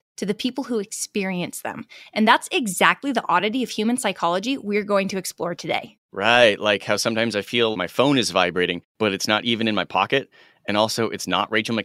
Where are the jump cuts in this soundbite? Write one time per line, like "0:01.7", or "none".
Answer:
0:07.7